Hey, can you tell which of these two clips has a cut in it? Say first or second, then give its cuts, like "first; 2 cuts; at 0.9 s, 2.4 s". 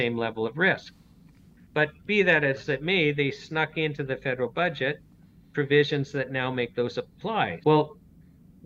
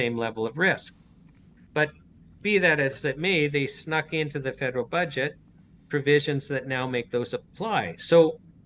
first; 2 cuts; at 2.0 s, 7.6 s